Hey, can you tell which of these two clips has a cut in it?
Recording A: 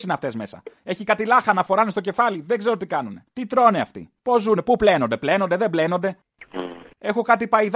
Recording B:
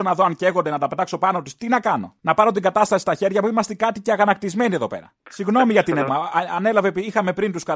B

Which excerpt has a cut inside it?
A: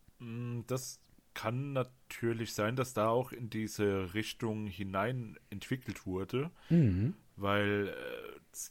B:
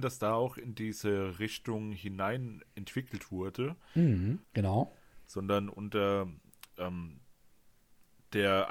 B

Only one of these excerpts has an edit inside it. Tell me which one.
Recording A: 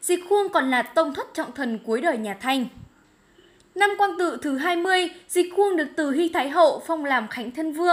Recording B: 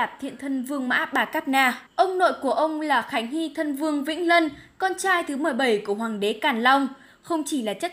B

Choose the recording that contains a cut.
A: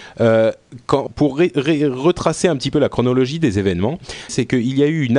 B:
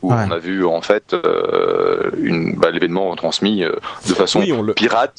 A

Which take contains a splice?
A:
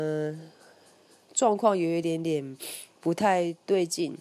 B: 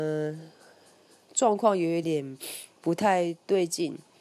B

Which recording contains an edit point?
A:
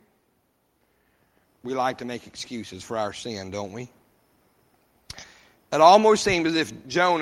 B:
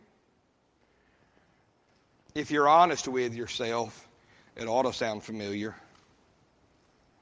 A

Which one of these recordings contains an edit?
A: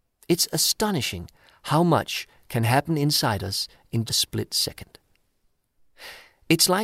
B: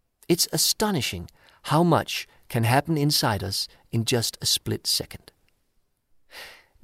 A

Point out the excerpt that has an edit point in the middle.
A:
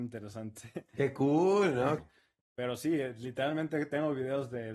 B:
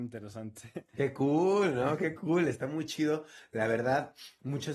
A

